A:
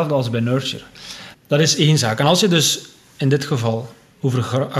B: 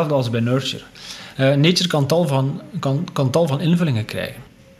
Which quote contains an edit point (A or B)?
A